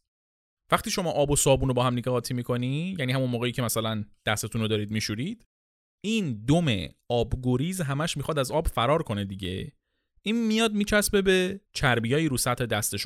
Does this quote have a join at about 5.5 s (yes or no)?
no